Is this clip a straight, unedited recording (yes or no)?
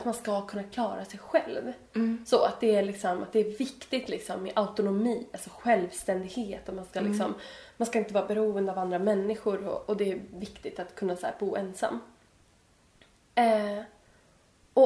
yes